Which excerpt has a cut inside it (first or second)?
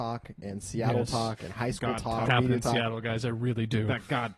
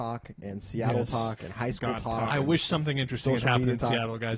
first